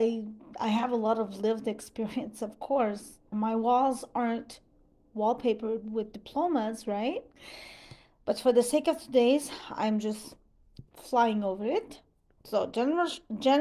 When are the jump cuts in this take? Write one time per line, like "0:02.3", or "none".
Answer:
0:03.3
0:07.3